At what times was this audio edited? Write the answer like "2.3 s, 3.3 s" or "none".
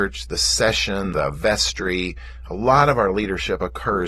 1.1 s